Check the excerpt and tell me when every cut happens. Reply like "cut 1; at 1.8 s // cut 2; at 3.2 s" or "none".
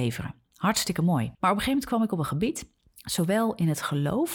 cut 1; at 1.3 s